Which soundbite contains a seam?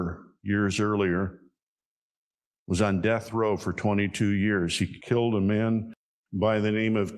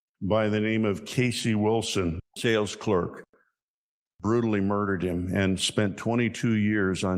second; 1 cut; at 2.2 s

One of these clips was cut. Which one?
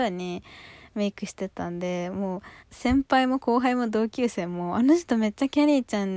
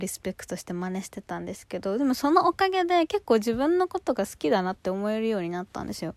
first; 1 cut; at 2.6 s

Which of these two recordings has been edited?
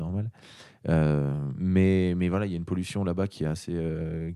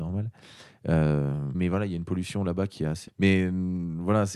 second; 2 cuts; at 1.5 s, 3.1 s

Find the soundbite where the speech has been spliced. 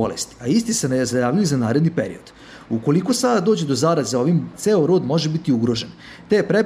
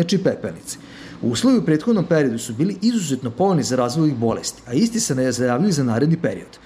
first; 1 cut; at 4.5 s

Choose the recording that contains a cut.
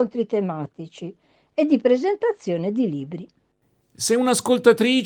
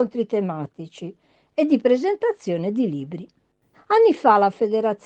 second; 1 cut; at 3.7 s

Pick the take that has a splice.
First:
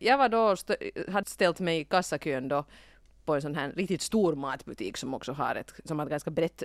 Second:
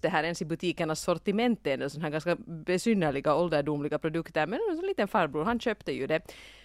first; 1 cut; at 1.2 s

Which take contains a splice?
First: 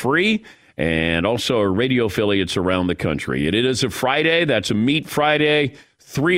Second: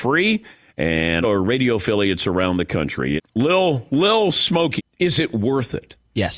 second; 3 cuts; at 1.2 s, 3.2 s, 4.8 s

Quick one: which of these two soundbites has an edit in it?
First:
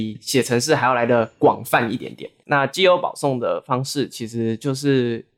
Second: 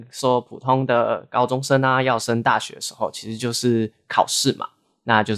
first; 1 cut; at 2.4 s

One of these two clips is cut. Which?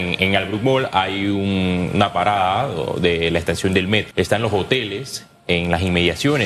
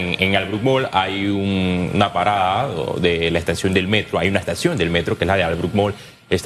first; 1 cut; at 4.1 s

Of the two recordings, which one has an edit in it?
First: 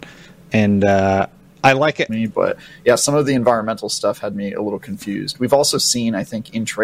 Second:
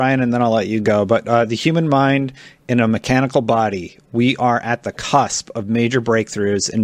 first; 1 cut; at 2.1 s

